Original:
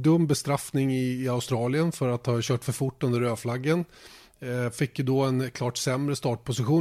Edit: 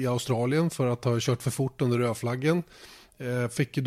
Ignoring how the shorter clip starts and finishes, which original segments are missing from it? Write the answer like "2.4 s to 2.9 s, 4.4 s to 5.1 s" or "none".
none